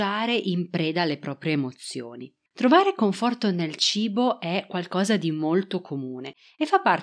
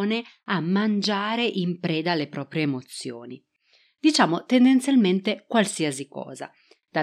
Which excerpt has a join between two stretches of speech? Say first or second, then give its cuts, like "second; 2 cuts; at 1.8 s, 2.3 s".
first; 1 cut; at 2.5 s